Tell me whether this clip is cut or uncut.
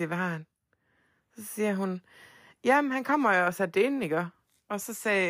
uncut